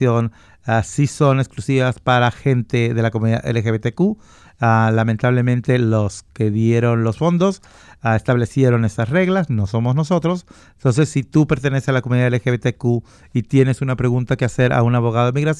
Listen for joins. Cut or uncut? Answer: uncut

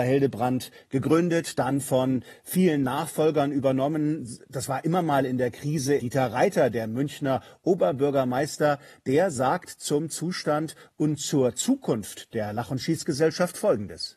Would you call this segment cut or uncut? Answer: cut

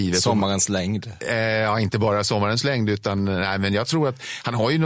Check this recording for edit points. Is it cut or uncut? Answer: uncut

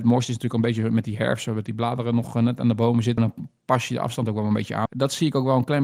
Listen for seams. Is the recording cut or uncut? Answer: cut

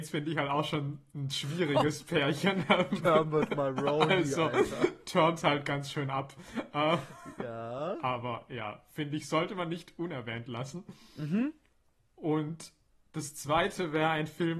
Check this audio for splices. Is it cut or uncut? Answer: uncut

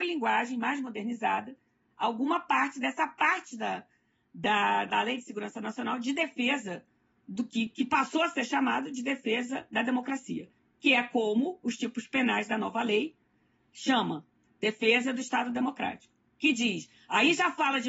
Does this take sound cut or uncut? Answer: cut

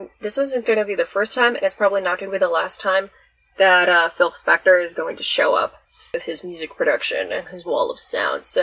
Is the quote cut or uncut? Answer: uncut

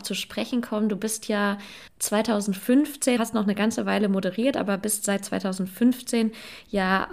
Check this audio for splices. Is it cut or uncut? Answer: cut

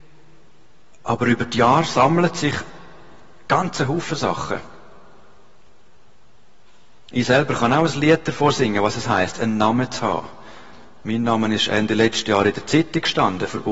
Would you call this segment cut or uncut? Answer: uncut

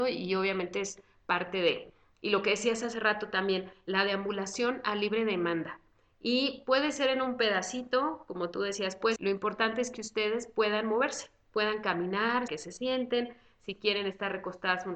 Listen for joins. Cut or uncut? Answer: cut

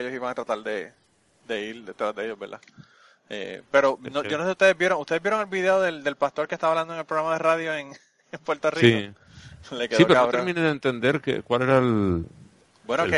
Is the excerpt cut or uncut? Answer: uncut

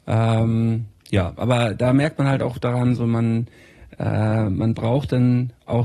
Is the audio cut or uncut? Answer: uncut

